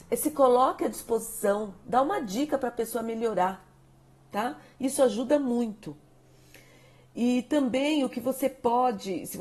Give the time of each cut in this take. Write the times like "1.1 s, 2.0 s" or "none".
none